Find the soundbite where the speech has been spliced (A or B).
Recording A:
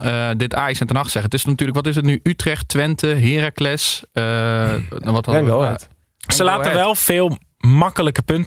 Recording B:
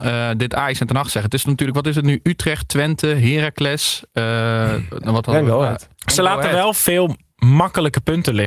B